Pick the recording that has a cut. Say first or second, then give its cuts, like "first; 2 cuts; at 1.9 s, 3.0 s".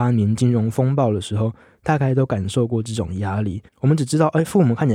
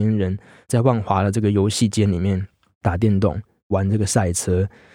first; 1 cut; at 3.7 s